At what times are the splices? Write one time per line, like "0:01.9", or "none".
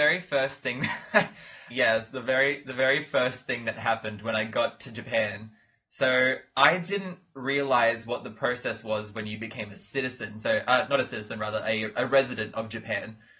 0:01.7